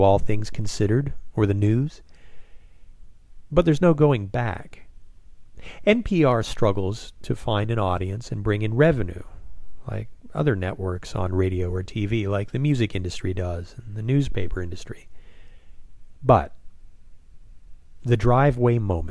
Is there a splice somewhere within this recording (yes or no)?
no